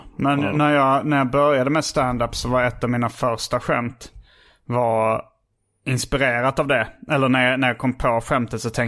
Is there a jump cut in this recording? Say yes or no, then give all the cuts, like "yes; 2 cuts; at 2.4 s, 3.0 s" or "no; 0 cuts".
no; 0 cuts